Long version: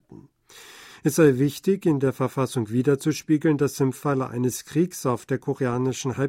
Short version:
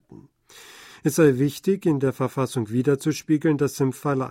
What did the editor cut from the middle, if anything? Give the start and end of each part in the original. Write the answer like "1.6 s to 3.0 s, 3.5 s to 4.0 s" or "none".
none